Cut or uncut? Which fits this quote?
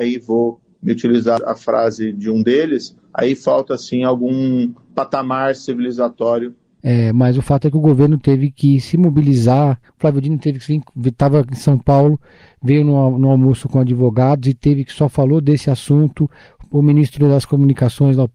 uncut